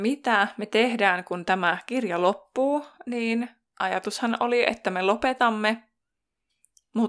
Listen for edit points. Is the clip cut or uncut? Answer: uncut